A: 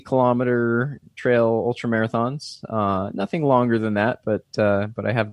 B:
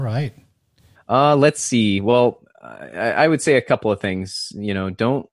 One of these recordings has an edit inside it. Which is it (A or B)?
B